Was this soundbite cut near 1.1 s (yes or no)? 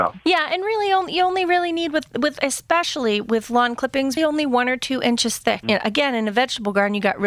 no